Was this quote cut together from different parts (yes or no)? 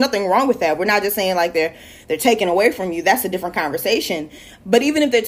no